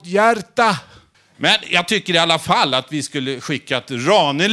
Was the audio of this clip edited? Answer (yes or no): yes